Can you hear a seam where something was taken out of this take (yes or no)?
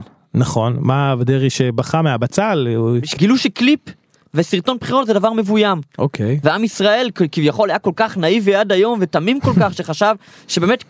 yes